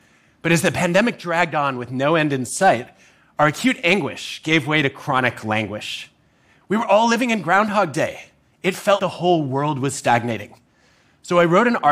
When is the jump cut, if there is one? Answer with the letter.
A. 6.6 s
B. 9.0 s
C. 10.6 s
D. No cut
B